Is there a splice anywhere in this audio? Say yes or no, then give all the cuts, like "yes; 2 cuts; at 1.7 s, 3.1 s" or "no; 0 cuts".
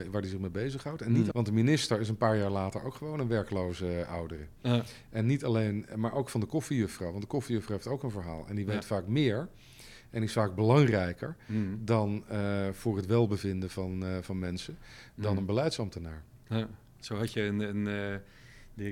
yes; 1 cut; at 1.3 s